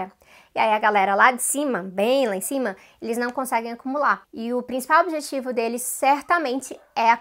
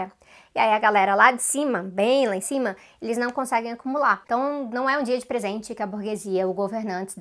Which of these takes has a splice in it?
second; 1 cut; at 4.2 s

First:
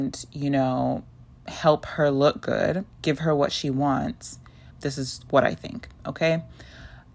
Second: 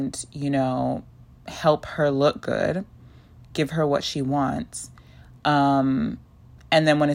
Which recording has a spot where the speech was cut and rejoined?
first; 2 cuts; at 2.9 s, 4.7 s

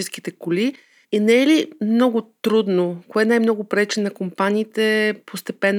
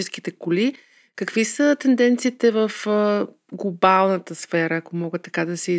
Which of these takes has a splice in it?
first; 1 cut; at 1.0 s

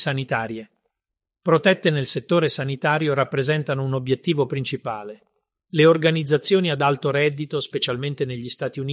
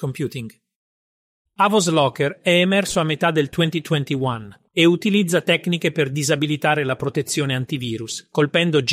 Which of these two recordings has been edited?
second; 2 cuts; at 1.5 s, 4.7 s

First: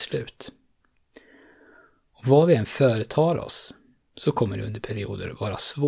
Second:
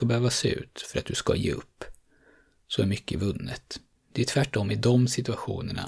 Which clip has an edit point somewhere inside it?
second; 1 cut; at 3.9 s

